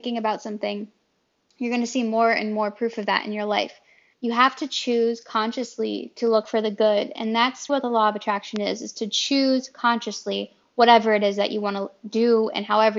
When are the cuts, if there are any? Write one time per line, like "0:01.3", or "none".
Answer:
0:04.1
0:07.7